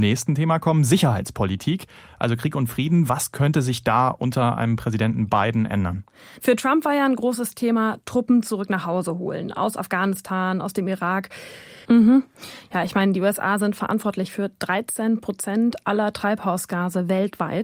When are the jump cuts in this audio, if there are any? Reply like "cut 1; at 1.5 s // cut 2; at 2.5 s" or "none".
cut 1; at 11.9 s